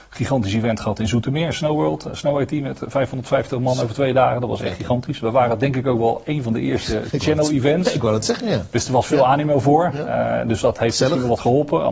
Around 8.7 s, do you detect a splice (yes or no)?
no